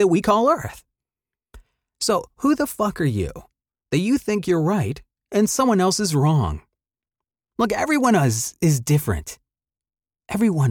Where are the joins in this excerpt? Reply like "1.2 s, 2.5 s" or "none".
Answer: none